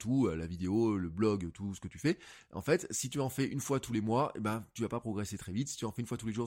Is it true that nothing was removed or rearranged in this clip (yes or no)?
yes